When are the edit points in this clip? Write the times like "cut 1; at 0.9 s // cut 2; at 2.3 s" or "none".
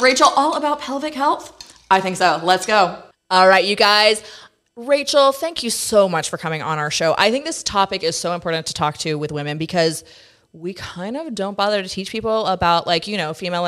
none